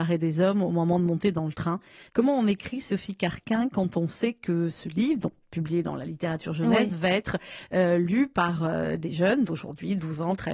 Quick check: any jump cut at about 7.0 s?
no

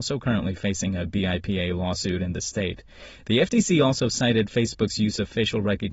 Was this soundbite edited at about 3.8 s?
no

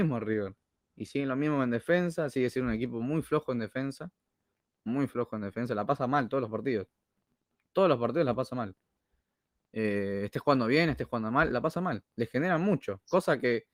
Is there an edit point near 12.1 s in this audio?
no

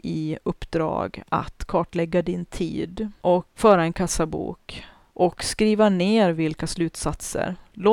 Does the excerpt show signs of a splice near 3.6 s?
yes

